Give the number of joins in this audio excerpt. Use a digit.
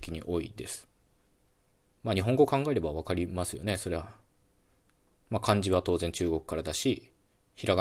0